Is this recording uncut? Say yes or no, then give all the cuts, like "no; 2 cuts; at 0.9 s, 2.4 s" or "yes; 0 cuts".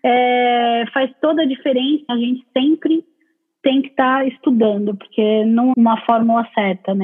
no; 2 cuts; at 2.1 s, 5.7 s